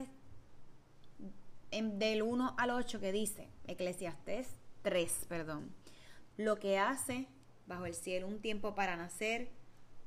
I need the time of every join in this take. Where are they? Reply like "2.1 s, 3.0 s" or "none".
6.3 s